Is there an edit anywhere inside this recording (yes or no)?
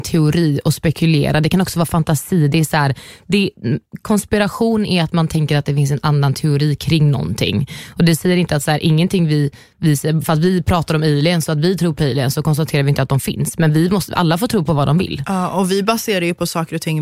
no